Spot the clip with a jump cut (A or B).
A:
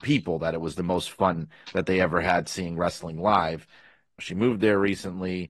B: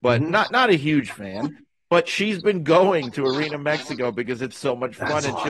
A